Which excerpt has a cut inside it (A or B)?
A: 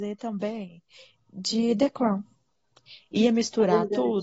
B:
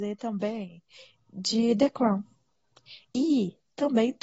B